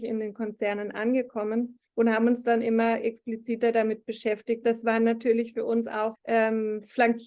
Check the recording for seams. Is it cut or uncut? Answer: cut